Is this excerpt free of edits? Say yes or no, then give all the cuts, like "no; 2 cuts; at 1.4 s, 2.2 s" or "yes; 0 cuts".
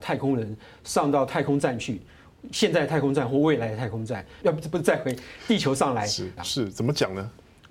no; 2 cuts; at 4.4 s, 6.4 s